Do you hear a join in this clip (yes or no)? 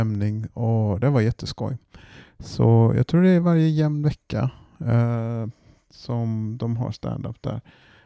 no